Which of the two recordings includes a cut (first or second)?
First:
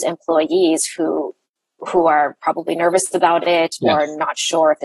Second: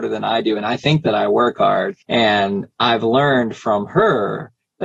second